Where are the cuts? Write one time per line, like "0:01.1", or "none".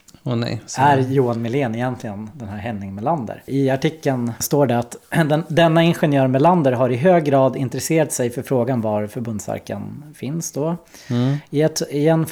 0:03.5